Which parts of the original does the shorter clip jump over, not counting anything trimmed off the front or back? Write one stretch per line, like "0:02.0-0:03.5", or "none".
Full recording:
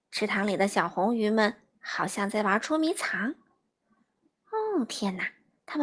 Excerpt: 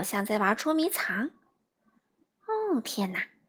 none